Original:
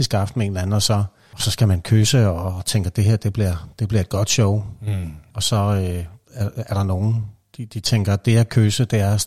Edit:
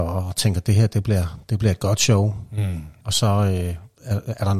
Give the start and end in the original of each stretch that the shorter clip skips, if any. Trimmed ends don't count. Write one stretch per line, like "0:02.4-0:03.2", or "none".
none